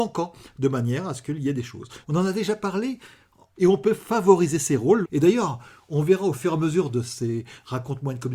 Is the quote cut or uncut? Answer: cut